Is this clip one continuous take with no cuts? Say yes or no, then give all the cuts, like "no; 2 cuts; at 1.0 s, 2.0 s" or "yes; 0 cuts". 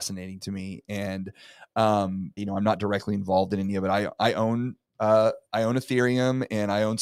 no; 1 cut; at 2.4 s